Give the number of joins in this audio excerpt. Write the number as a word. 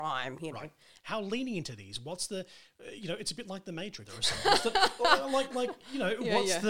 two